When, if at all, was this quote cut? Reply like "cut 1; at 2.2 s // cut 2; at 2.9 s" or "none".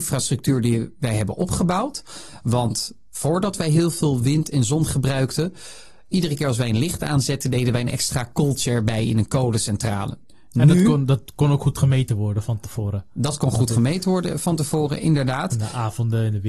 none